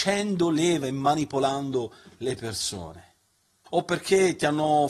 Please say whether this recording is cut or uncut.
cut